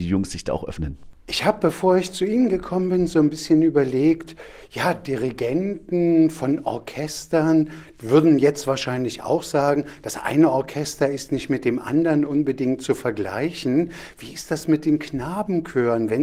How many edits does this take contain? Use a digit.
0